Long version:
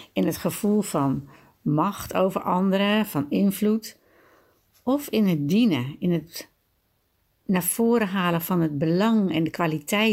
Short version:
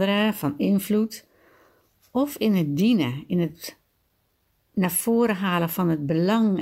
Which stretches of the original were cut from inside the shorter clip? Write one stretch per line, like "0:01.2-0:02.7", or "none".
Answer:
none